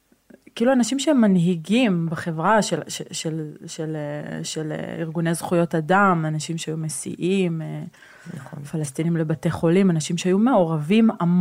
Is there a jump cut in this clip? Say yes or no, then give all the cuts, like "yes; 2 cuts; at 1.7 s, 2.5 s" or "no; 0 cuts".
no; 0 cuts